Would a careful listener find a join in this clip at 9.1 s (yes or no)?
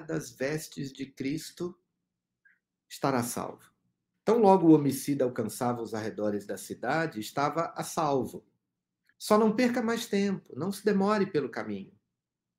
yes